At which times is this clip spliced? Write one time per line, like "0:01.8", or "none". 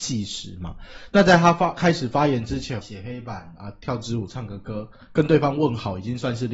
0:02.8